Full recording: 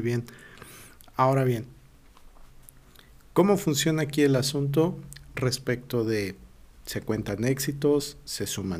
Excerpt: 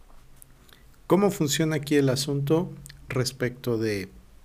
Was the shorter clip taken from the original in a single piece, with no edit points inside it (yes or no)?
yes